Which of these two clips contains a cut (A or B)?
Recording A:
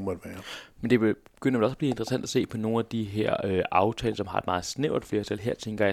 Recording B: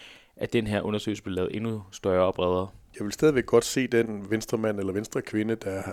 B